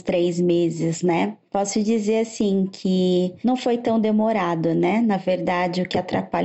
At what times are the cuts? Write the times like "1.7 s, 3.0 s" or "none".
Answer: none